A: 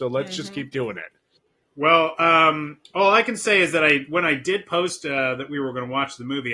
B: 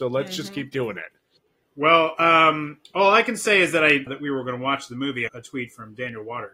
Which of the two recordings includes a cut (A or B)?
B